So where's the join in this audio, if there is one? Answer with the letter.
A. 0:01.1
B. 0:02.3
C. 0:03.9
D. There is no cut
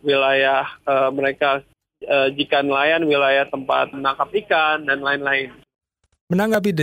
C